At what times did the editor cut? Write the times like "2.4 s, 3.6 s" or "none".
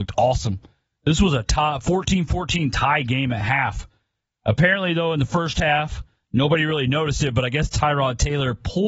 none